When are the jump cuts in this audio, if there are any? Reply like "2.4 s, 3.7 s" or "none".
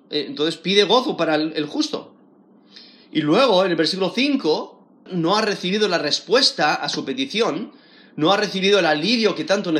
5.1 s